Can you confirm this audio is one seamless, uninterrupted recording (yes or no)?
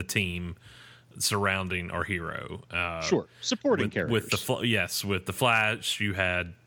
yes